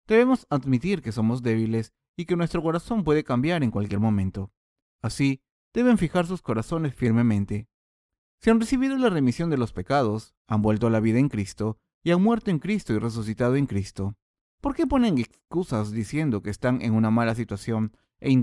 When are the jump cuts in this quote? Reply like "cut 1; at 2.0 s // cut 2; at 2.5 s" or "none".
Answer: cut 1; at 14.5 s

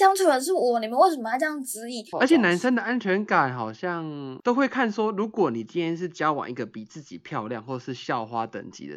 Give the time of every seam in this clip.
cut 1; at 2.1 s

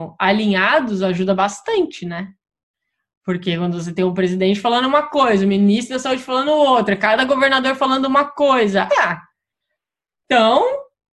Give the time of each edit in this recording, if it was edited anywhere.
cut 1; at 8.9 s

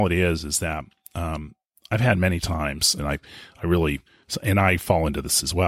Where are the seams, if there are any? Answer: cut 1; at 3.0 s

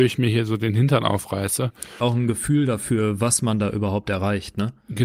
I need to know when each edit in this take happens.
cut 1; at 2.0 s

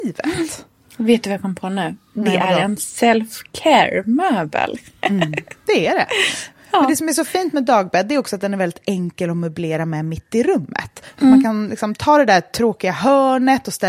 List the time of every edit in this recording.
none

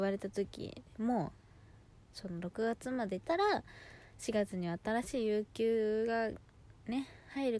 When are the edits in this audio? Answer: none

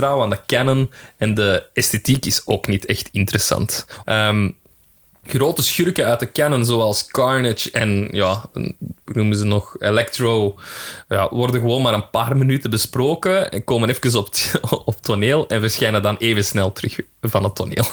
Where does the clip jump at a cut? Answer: cut 1; at 4.0 s

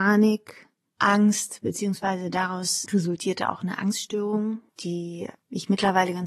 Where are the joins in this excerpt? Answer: cut 1; at 4.7 s

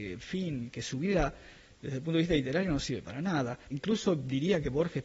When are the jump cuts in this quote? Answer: cut 1; at 3.7 s

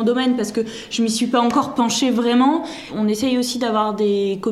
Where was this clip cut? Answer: none

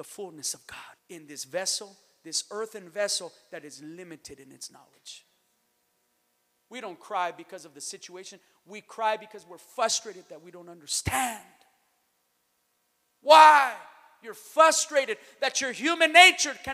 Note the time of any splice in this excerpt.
cut 1; at 1.0 s

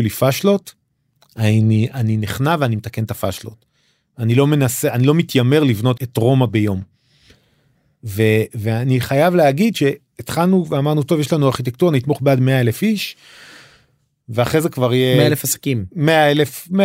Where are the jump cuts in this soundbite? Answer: cut 1; at 6.0 s

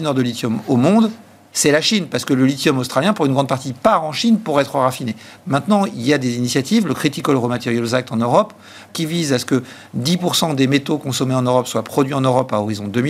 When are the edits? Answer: cut 1; at 5.4 s // cut 2; at 8.9 s

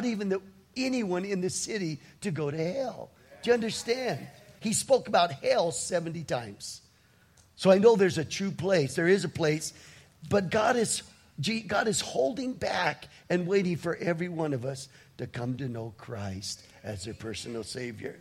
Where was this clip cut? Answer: cut 1; at 4.6 s

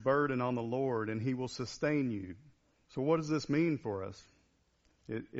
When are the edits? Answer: cut 1; at 2.8 s

